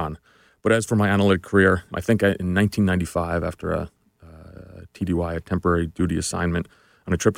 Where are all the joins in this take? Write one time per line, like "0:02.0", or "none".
0:01.9